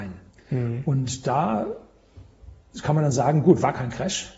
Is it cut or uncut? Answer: uncut